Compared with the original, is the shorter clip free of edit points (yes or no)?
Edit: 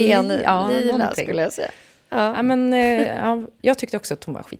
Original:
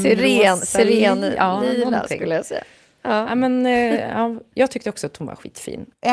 yes